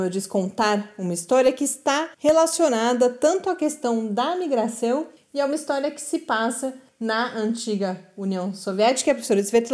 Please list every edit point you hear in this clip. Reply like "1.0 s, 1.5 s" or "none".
2.1 s